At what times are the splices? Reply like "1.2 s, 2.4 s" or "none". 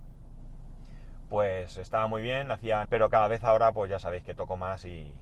2.9 s